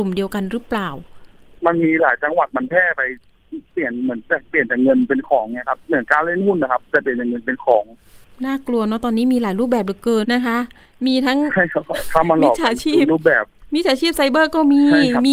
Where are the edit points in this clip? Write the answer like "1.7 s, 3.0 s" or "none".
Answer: 10.2 s